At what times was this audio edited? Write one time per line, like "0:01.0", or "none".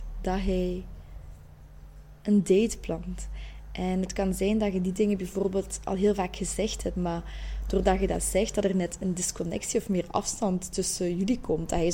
none